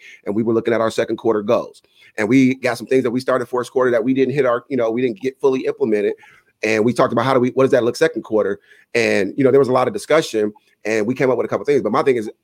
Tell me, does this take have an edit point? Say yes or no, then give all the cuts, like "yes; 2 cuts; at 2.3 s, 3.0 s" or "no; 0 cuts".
yes; 1 cut; at 7.9 s